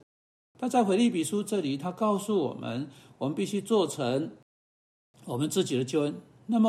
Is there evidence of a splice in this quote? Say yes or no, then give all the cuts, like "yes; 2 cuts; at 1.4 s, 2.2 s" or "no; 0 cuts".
no; 0 cuts